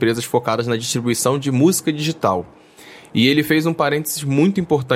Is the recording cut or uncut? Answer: uncut